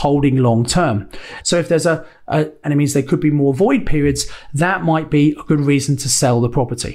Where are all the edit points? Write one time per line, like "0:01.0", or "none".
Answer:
0:01.4
0:02.6